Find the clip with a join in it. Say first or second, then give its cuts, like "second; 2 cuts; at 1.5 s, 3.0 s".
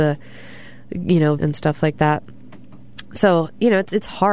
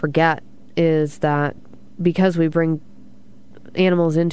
first; 1 cut; at 1.4 s